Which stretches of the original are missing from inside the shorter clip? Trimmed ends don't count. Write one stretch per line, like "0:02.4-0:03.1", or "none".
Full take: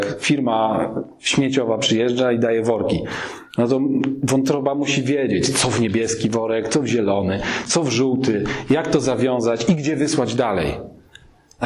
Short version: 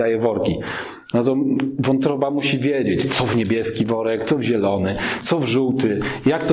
none